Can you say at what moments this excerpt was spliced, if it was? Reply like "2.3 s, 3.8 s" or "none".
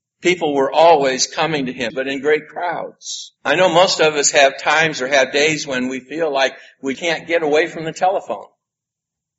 1.9 s, 3.4 s, 6.9 s